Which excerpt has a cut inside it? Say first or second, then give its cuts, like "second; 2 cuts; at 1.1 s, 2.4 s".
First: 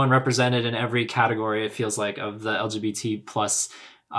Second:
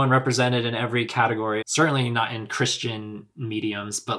second; 1 cut; at 1.6 s